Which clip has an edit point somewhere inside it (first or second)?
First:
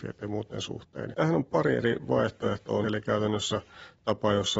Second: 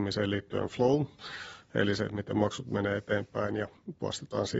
first